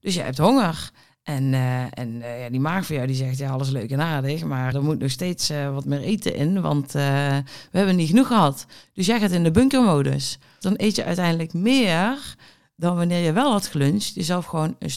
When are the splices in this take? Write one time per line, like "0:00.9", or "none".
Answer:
0:04.7
0:10.6

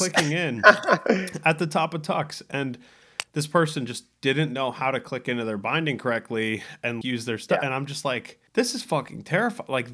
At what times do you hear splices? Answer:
0:07.0
0:08.5

